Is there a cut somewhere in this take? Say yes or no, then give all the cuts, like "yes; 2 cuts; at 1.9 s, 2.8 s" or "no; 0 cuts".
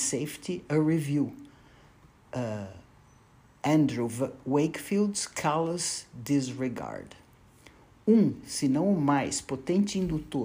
no; 0 cuts